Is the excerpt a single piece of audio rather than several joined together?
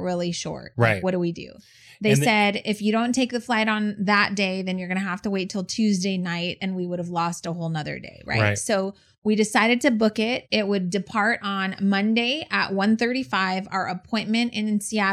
yes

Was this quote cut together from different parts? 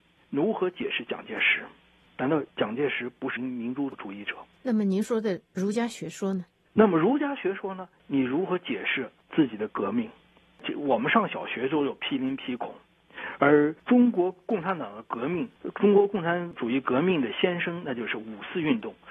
yes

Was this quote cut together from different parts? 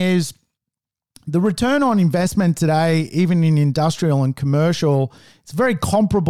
no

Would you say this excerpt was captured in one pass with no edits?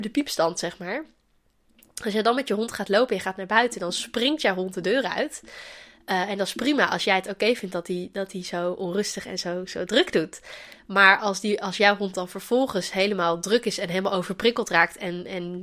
yes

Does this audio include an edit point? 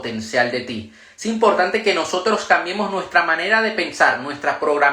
no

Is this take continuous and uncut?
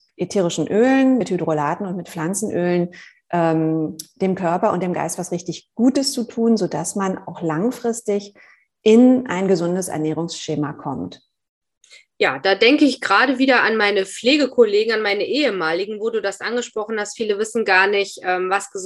yes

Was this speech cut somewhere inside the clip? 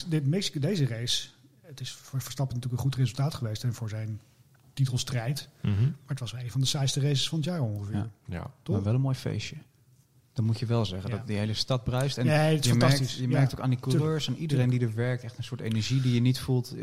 no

